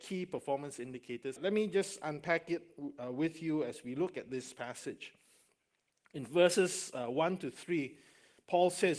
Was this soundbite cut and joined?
yes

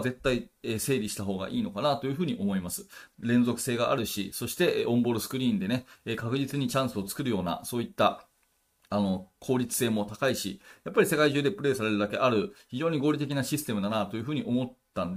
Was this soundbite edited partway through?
yes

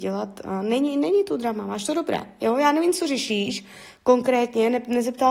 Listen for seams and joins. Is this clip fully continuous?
yes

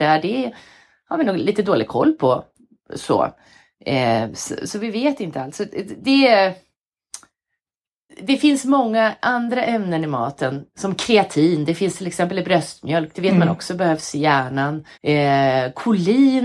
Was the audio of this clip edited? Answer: yes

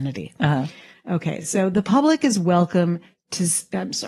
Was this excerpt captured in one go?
yes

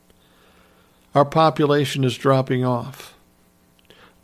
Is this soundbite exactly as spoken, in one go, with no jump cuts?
yes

